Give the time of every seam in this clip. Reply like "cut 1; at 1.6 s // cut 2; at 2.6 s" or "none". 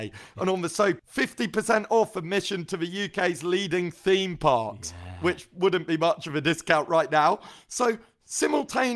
cut 1; at 1.0 s